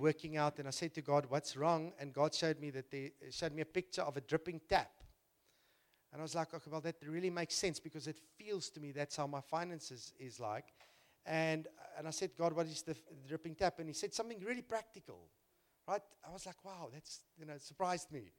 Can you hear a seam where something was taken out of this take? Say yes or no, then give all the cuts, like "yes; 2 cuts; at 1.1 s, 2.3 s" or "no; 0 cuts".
no; 0 cuts